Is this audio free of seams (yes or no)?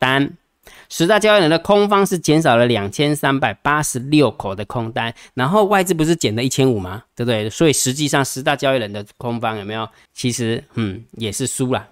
no